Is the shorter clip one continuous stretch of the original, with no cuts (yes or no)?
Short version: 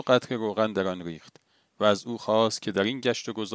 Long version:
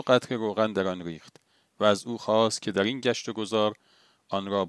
yes